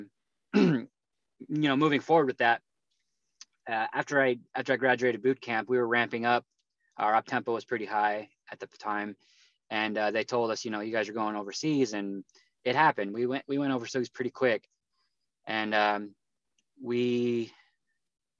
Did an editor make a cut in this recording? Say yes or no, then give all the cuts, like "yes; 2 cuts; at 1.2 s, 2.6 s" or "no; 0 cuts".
no; 0 cuts